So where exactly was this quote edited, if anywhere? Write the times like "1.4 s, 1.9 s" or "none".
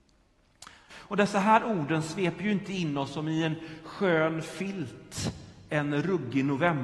0.9 s